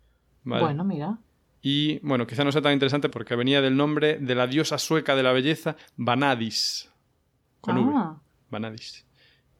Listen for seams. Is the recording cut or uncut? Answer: cut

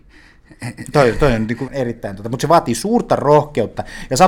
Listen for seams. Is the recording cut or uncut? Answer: cut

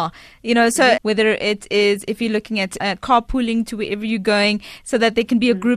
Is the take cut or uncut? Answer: cut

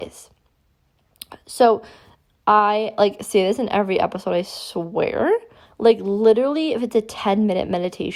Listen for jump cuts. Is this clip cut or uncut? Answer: cut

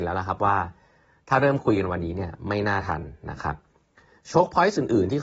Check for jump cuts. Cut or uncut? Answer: uncut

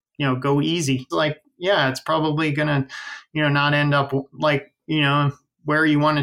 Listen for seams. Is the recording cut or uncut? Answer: cut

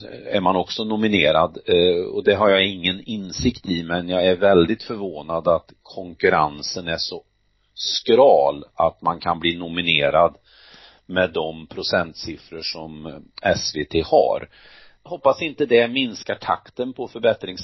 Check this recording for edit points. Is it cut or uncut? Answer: cut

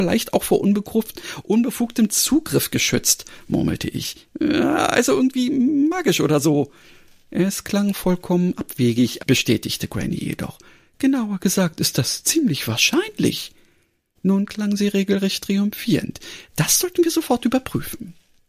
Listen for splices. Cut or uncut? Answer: cut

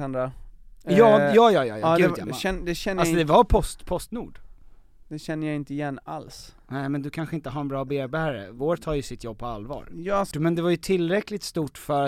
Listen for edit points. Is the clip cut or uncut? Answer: cut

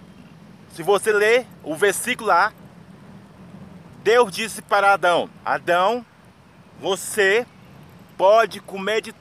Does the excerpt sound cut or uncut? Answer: uncut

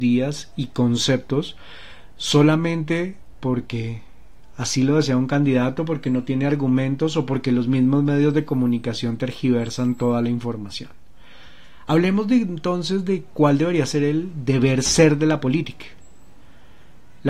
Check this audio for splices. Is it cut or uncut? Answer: uncut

